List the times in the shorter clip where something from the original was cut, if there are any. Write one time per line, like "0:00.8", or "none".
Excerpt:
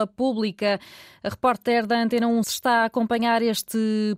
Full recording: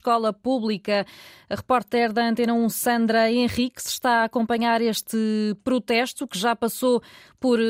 0:02.4

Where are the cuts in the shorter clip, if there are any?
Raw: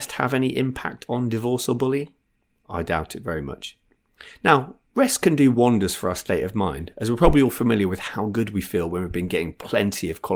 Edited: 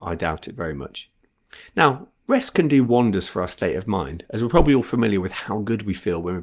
none

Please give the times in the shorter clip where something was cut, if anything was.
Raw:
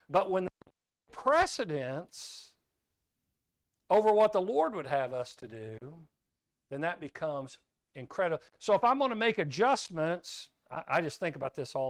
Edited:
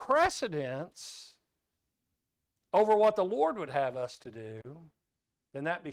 none

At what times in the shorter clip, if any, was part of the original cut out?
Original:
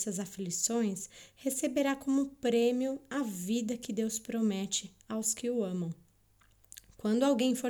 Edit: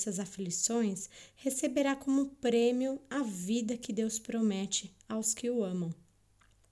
none

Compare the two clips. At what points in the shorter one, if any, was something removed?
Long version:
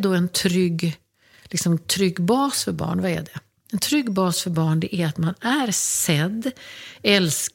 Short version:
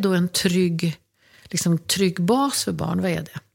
none

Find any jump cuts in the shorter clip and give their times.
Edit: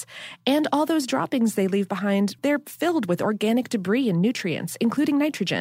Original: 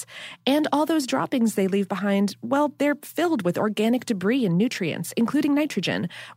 0:02.4

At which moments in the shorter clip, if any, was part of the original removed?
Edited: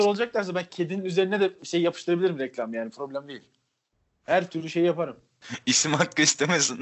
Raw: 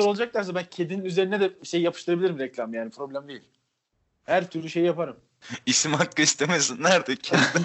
none

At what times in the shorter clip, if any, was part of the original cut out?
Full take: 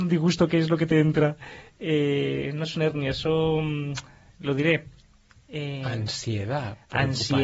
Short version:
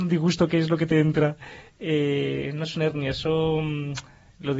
none

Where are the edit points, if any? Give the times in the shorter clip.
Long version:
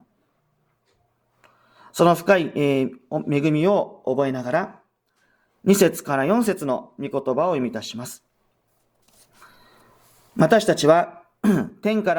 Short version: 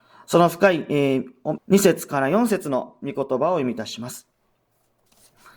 0:01.6

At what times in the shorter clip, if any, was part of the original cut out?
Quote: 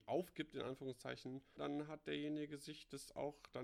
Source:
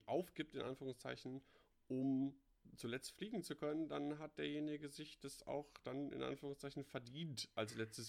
0:01.6

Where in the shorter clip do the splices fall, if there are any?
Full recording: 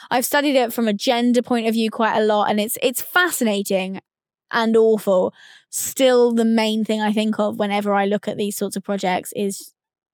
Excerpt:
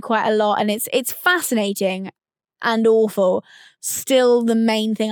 none

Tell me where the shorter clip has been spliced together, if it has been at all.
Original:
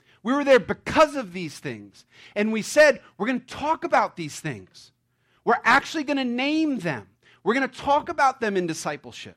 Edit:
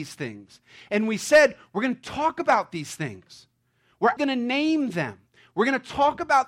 0:04.2

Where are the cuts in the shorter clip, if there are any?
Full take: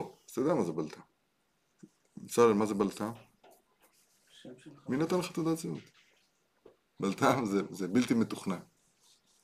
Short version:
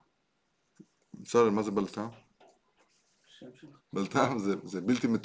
0:03.8

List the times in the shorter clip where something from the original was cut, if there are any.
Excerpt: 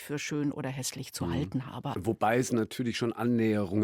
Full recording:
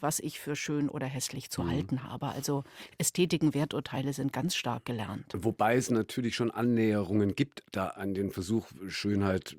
0:01.9

